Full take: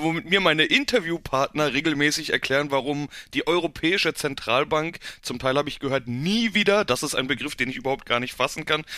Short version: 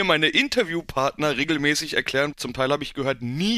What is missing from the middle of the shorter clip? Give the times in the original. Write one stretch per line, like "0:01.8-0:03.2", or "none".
0:02.7-0:05.2